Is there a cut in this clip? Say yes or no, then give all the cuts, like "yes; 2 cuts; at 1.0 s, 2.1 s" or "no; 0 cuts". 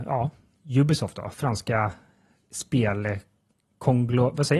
no; 0 cuts